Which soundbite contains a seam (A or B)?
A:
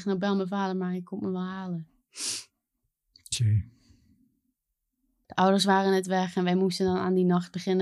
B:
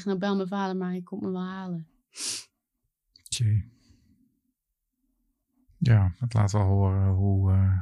A